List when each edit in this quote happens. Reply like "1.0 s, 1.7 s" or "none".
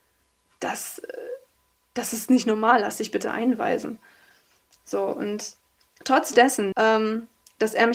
6.7 s